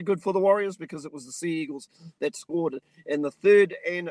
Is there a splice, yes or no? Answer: no